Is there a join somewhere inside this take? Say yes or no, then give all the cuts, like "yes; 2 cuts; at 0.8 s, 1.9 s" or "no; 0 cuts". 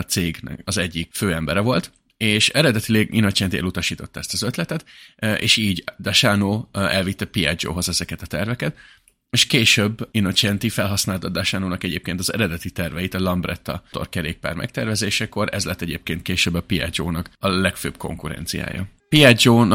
no; 0 cuts